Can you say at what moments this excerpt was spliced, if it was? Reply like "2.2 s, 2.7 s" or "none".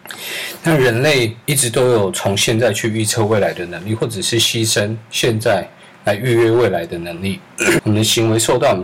1.4 s, 7.8 s